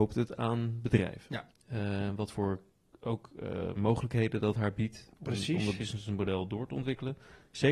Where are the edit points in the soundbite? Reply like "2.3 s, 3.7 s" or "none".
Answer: 1.5 s